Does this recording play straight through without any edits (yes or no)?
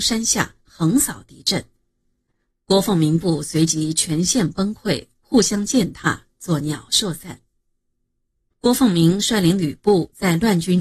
yes